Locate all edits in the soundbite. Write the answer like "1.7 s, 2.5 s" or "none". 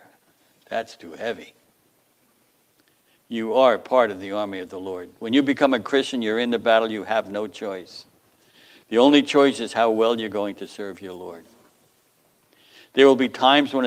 none